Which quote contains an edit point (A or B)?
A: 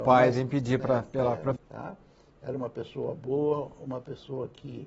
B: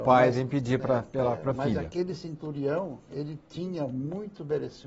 A